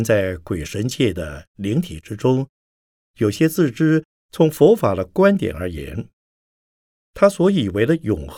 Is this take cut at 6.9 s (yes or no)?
no